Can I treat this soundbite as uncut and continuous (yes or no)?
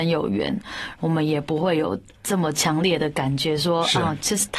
no